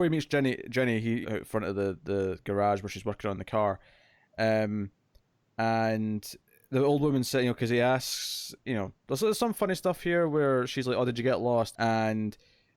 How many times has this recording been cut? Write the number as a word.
two